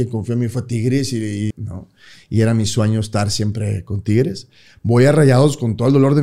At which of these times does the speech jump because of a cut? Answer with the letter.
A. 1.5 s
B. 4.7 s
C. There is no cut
A